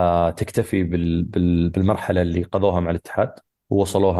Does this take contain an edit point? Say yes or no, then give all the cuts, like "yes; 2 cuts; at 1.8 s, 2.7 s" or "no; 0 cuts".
no; 0 cuts